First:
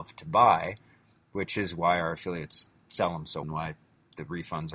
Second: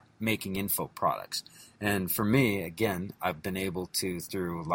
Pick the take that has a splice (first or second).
first